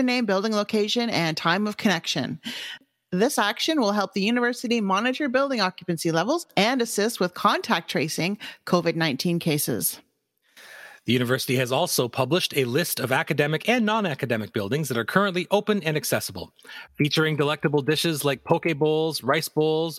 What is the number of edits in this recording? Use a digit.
1